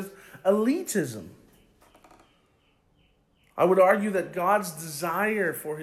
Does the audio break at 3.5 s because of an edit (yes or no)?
no